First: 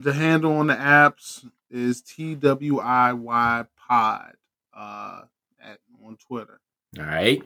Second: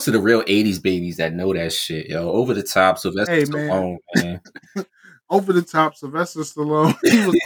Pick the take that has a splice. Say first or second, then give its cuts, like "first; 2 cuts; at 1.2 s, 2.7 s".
second; 1 cut; at 4.9 s